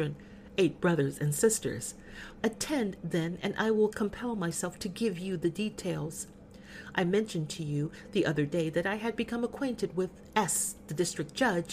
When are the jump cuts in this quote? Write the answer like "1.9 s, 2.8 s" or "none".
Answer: 2.4 s